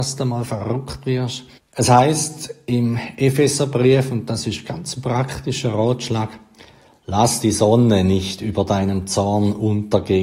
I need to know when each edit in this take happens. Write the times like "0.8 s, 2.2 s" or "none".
1.6 s